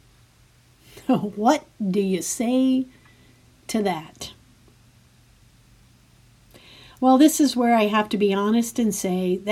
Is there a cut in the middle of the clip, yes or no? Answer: no